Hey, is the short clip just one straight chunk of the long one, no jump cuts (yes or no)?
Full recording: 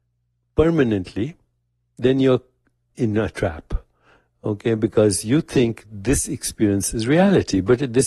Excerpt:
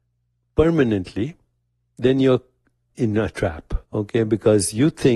no